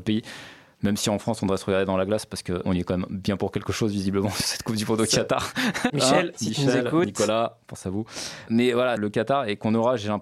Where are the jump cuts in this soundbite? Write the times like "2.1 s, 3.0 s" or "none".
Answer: 5.9 s, 9.0 s